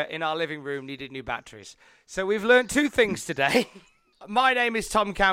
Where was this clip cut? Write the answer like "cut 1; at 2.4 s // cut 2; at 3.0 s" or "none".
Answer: cut 1; at 4.1 s